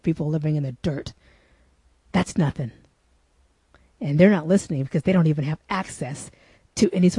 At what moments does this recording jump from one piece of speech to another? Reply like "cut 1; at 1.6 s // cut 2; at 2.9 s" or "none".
none